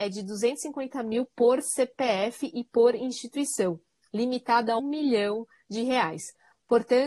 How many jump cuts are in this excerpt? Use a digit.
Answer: 1